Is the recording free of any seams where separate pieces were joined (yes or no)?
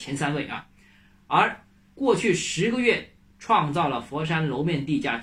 no